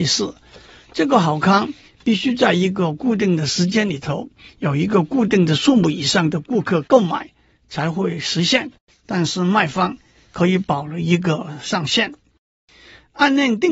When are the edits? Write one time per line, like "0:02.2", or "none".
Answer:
0:08.9